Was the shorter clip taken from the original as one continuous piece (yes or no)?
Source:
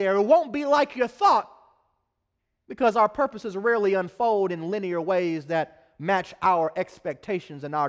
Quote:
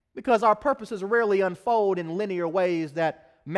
yes